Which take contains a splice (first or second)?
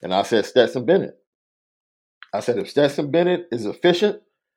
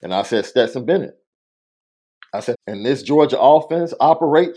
second